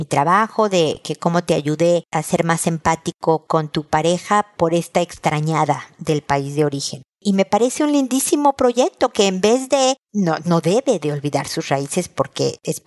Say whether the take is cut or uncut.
cut